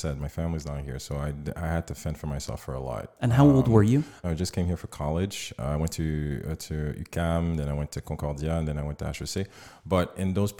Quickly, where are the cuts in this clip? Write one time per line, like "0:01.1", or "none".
0:04.2